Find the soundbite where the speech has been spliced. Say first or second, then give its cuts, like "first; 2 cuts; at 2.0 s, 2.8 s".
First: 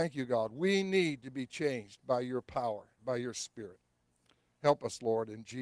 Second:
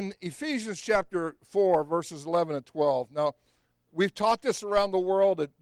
first; 1 cut; at 3.0 s